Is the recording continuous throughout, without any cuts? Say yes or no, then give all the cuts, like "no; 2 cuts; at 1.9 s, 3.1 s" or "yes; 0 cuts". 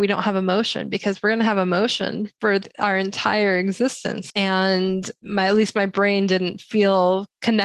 no; 1 cut; at 4.3 s